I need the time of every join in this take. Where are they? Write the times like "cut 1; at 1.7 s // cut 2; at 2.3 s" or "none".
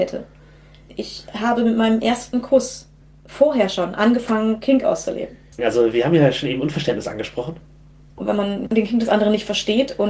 cut 1; at 5.6 s // cut 2; at 8.1 s

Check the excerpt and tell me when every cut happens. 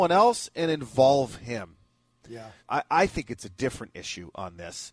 cut 1; at 2.6 s

